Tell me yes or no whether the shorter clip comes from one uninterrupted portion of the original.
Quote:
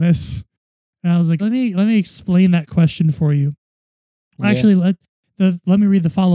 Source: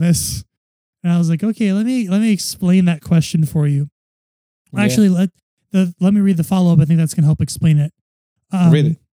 no